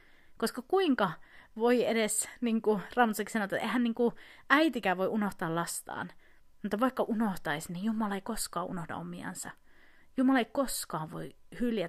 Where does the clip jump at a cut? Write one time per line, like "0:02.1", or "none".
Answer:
none